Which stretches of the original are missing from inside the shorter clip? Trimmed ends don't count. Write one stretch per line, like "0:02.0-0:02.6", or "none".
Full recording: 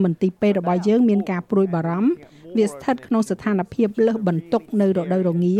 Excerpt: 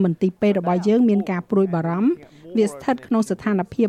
none